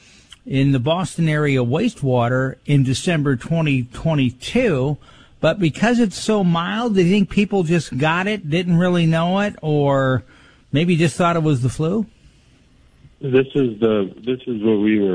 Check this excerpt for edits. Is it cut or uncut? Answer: uncut